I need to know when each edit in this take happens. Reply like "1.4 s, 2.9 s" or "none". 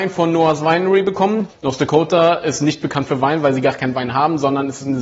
1.5 s